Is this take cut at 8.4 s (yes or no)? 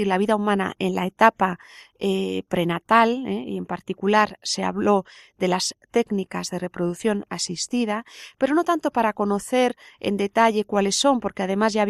no